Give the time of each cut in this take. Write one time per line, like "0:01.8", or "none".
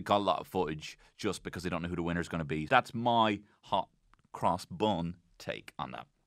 0:02.7